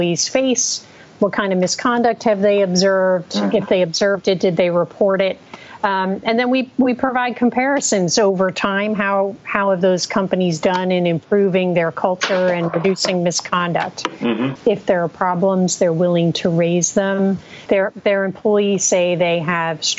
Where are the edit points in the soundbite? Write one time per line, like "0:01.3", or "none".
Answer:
0:14.6
0:17.7